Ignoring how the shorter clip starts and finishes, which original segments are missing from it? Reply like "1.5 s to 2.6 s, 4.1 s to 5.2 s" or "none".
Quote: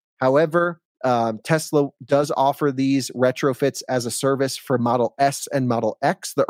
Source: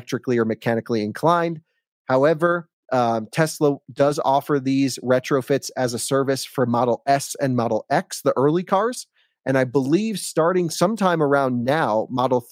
none